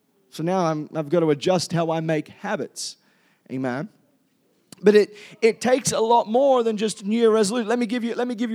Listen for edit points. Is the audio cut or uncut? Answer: uncut